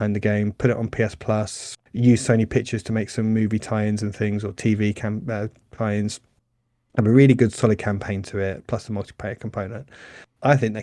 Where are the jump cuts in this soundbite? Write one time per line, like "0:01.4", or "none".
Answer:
0:01.9